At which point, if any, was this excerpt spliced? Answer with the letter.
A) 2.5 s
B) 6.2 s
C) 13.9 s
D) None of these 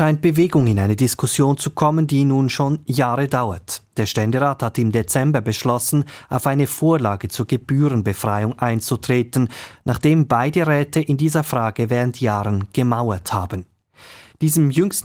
D